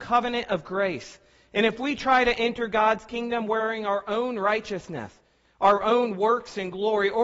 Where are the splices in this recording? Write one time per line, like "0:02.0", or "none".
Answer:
none